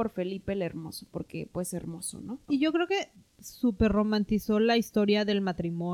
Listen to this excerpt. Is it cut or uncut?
cut